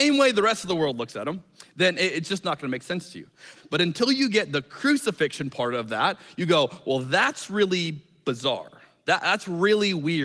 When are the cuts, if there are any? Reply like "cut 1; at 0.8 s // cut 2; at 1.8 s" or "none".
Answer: cut 1; at 3.5 s